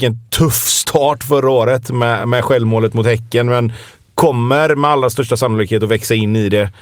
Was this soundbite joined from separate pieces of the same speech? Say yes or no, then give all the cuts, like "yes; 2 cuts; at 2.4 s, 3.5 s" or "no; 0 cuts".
no; 0 cuts